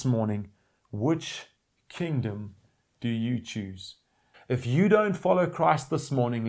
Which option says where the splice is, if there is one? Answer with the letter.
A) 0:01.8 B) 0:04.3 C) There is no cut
B